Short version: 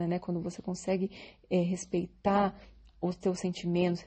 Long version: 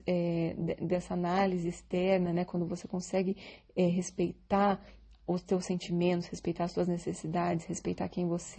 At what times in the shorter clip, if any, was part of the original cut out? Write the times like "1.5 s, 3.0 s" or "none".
none